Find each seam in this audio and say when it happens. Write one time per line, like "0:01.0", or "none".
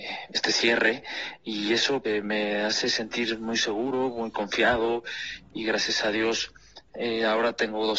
0:02.0